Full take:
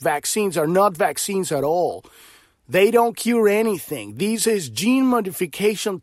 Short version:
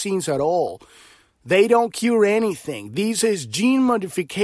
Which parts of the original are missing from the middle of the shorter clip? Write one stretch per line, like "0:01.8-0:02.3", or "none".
none